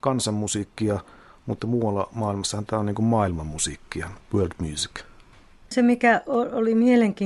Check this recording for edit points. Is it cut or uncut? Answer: uncut